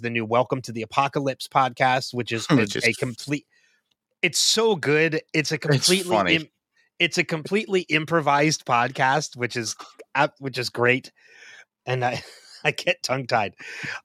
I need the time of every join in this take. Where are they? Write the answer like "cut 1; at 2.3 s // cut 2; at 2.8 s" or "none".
cut 1; at 11.6 s